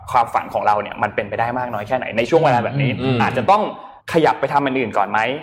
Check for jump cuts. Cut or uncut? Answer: cut